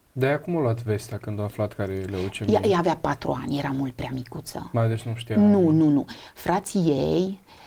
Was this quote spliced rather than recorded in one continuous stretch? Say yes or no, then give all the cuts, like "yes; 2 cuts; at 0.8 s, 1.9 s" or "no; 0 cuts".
no; 0 cuts